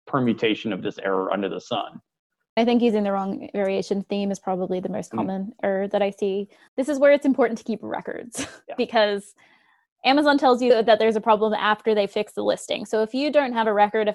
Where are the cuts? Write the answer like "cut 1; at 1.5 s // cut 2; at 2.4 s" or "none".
none